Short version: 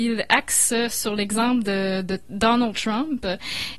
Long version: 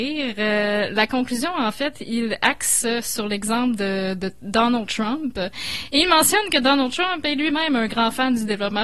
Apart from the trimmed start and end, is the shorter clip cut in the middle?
no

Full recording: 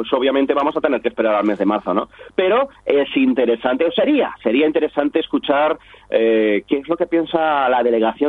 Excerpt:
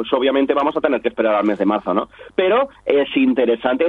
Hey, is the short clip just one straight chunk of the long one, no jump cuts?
yes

